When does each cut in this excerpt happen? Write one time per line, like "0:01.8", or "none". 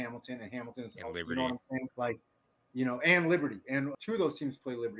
0:01.9
0:03.9